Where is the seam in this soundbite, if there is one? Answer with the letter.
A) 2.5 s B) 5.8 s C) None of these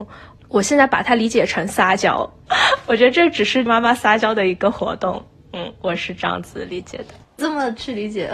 A